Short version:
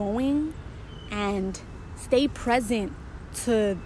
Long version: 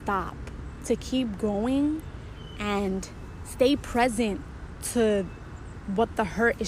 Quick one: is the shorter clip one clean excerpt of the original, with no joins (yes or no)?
yes